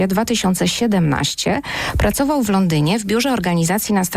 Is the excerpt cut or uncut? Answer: uncut